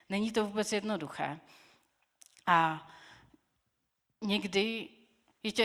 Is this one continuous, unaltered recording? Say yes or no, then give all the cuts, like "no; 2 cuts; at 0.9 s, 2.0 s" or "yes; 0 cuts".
yes; 0 cuts